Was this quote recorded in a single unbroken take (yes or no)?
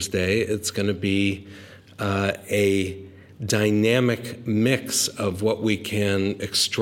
yes